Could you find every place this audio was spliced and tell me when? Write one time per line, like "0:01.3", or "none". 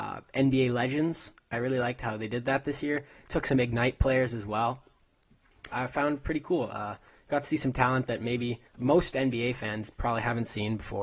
0:01.5
0:05.7
0:08.7